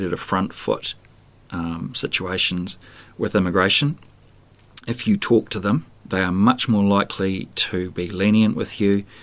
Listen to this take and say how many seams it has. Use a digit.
1